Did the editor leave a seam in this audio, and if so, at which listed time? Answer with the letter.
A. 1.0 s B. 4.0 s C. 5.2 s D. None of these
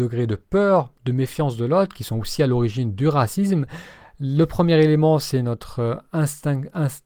D